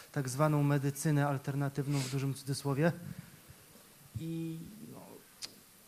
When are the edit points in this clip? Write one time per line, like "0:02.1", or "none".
none